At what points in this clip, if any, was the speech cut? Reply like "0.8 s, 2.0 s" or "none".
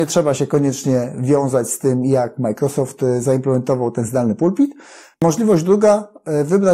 5.1 s